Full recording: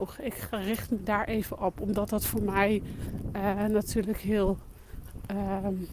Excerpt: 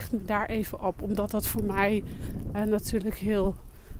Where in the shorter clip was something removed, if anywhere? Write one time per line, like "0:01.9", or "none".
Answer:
0:02.5